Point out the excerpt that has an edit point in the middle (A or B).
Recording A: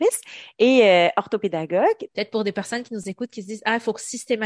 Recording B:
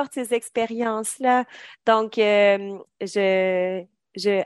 A